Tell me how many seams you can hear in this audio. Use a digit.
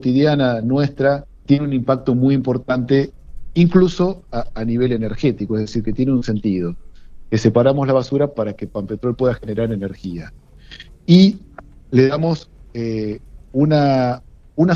1